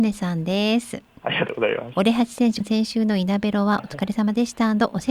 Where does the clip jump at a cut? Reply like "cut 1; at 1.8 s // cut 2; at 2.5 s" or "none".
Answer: cut 1; at 1.2 s // cut 2; at 2.6 s